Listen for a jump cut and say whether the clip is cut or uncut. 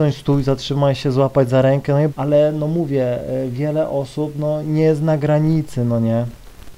cut